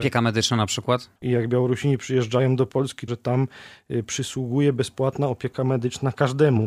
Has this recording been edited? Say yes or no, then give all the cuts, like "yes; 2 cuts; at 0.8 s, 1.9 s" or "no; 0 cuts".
yes; 2 cuts; at 1.2 s, 3.1 s